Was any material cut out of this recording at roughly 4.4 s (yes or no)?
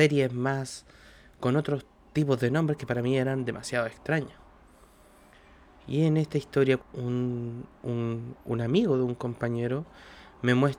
no